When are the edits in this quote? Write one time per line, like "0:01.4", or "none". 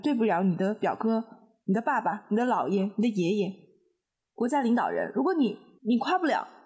none